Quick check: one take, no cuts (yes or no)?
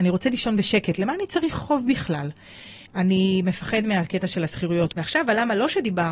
no